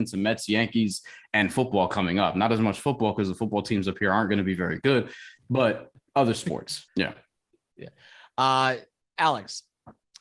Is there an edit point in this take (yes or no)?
yes